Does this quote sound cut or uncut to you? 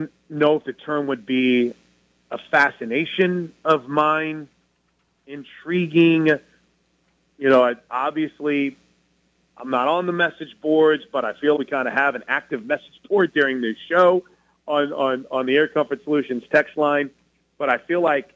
cut